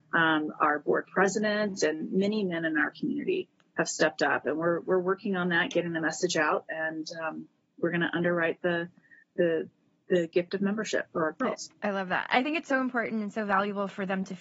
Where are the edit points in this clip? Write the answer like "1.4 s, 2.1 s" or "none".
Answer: none